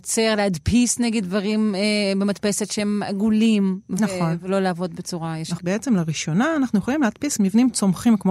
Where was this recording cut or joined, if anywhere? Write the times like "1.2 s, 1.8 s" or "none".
5.6 s